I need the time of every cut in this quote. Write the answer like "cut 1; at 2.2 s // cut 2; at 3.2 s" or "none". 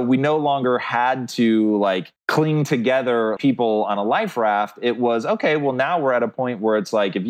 cut 1; at 2.2 s // cut 2; at 3.4 s